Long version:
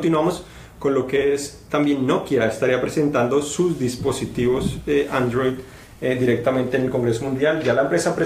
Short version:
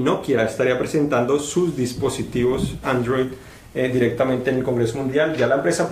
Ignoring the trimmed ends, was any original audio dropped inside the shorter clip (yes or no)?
yes